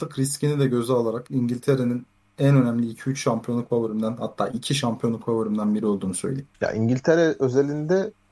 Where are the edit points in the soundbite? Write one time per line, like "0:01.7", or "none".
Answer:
0:06.5

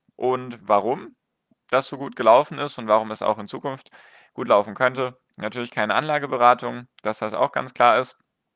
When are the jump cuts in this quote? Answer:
none

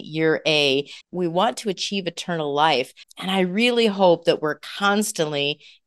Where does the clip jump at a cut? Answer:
0:01.0
0:03.0

